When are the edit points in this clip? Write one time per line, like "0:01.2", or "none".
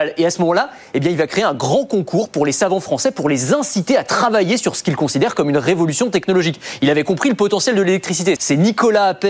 0:08.4